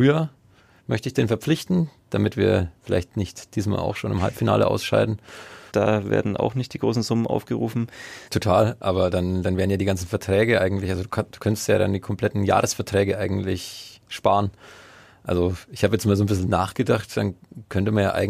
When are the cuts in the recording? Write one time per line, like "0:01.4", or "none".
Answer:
0:05.7
0:08.3